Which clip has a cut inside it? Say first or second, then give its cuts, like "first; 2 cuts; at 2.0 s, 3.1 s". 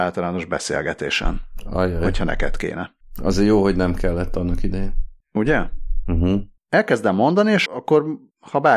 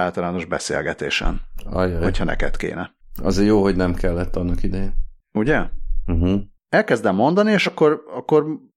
first; 1 cut; at 7.7 s